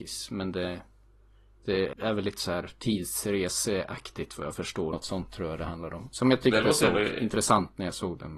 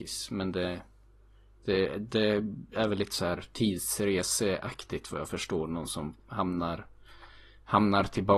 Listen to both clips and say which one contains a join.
first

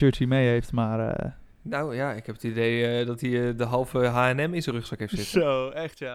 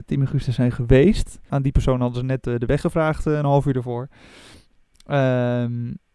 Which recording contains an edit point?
second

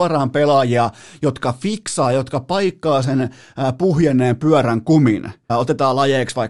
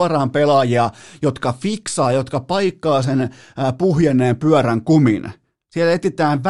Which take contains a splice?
first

